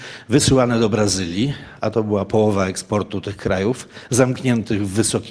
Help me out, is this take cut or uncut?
uncut